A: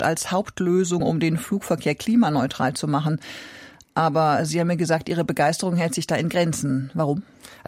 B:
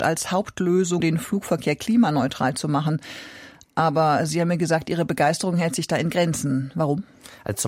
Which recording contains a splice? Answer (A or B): B